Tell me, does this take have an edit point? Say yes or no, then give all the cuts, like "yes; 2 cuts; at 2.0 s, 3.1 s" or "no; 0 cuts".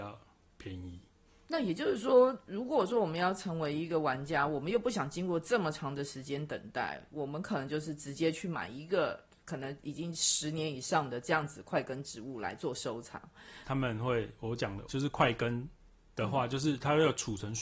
yes; 2 cuts; at 13.7 s, 14.9 s